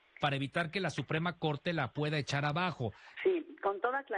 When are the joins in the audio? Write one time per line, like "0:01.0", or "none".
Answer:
0:03.2